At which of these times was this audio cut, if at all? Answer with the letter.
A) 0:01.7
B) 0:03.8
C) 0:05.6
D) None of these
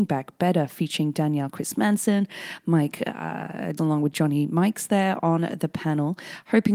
B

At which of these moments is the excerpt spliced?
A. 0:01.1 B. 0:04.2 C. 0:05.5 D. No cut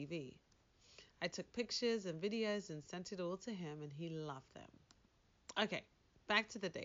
D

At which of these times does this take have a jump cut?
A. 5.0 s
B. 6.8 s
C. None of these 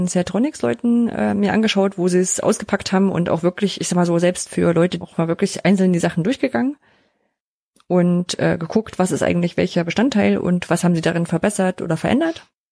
A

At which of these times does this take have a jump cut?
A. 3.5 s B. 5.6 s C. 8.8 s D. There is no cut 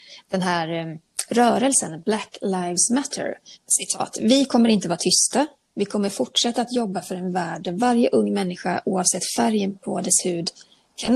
A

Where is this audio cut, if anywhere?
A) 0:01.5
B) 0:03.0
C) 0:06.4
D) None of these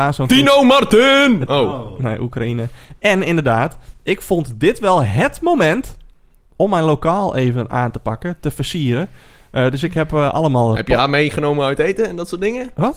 A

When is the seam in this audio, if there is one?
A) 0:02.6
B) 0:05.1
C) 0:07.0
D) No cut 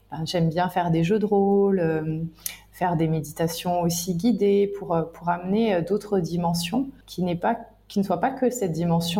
C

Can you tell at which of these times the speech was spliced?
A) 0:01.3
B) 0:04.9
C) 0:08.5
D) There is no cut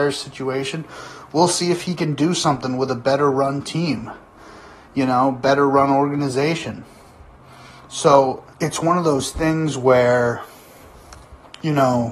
C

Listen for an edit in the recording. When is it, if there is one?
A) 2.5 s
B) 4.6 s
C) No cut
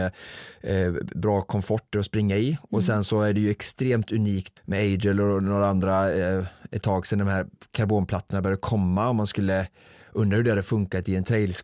B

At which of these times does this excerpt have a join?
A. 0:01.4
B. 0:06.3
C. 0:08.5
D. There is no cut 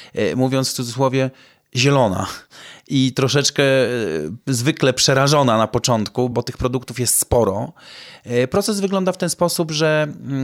B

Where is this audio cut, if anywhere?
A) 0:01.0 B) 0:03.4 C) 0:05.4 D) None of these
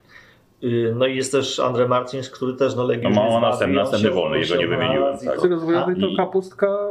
C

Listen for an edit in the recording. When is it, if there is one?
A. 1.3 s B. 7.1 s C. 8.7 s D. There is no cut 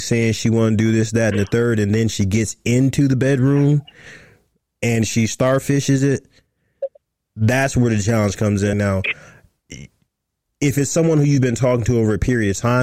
C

